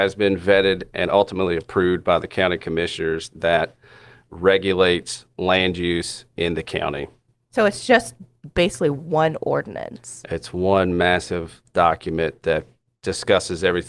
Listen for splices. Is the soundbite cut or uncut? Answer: uncut